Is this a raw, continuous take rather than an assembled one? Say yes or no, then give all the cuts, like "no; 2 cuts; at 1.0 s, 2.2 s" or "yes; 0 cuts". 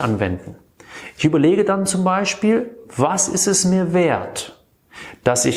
yes; 0 cuts